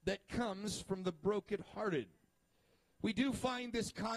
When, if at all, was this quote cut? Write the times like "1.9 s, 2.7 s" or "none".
none